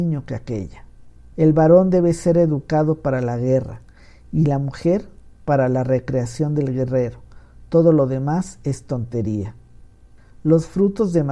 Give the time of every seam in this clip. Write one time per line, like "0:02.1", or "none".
0:01.3